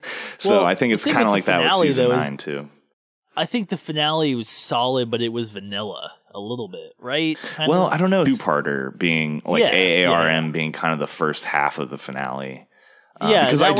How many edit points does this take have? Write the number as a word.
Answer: one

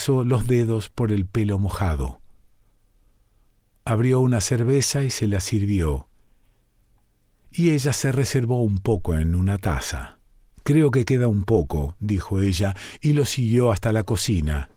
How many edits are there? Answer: one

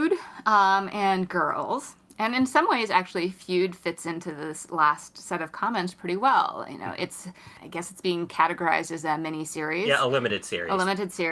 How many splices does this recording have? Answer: zero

